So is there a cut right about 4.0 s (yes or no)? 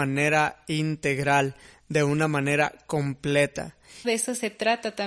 yes